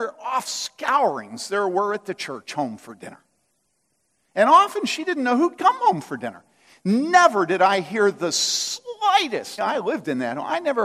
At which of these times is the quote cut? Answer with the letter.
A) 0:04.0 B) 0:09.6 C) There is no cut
B